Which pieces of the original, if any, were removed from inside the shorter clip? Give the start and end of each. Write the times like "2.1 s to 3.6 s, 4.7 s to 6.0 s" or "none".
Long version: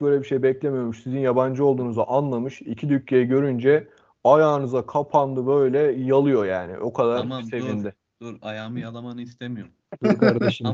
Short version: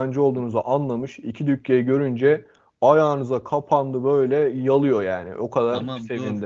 none